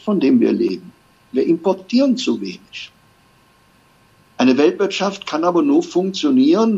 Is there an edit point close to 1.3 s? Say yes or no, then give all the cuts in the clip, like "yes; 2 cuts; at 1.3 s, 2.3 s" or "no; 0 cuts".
yes; 1 cut; at 1.3 s